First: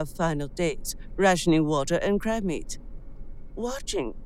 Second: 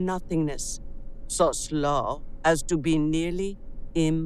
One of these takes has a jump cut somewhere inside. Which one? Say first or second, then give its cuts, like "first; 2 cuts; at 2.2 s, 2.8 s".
second; 1 cut; at 1.2 s